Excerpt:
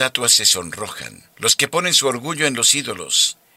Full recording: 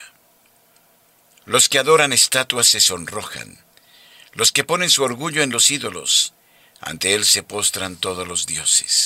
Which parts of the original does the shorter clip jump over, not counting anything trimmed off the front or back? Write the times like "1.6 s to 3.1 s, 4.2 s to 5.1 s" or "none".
3.7 s to 4.3 s